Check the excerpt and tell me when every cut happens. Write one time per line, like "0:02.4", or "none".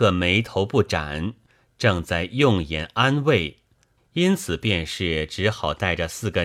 0:04.0